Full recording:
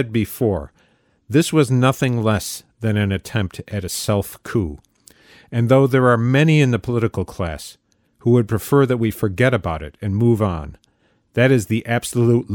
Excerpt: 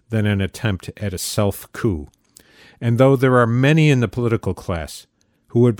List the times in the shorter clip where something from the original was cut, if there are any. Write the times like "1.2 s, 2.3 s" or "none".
none